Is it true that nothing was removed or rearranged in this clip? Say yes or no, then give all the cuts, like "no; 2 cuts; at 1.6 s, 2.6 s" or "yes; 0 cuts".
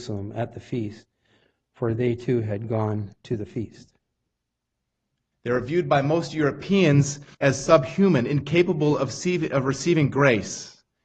no; 2 cuts; at 5.3 s, 7.3 s